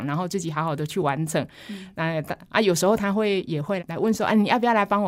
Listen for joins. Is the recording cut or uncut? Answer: cut